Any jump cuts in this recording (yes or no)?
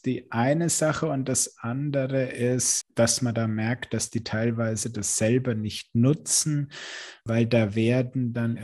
yes